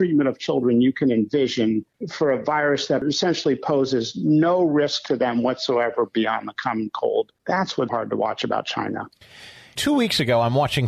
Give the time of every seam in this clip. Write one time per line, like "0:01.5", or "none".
0:07.9